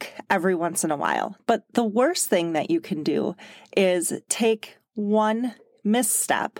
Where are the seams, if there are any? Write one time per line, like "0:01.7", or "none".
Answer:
0:01.4